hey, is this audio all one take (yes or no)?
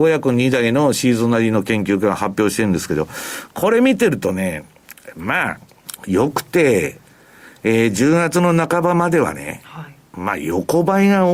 yes